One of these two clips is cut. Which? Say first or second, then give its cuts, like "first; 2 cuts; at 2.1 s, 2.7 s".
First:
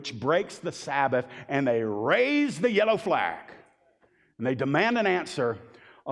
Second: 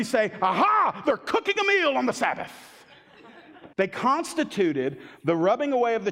second; 1 cut; at 3.7 s